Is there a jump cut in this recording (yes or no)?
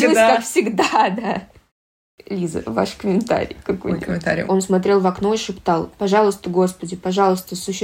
yes